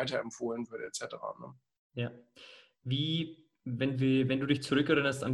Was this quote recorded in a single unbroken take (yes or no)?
yes